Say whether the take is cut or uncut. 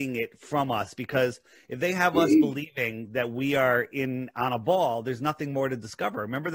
uncut